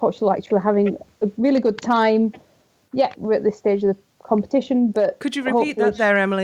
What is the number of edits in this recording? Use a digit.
1